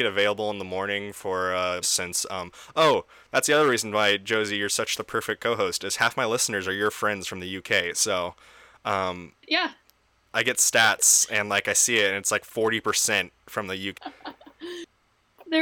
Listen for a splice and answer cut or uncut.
cut